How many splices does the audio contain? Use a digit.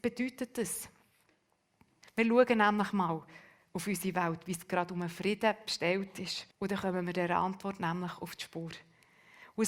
2